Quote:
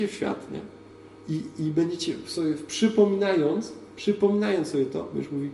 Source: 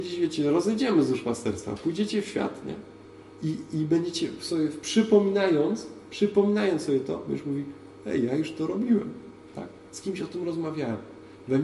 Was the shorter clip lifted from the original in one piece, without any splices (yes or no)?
yes